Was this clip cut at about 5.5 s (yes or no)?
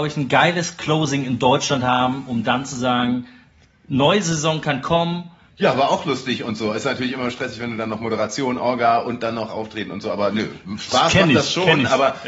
yes